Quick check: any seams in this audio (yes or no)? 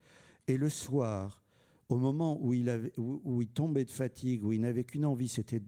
no